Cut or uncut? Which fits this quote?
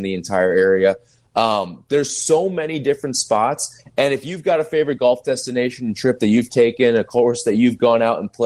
uncut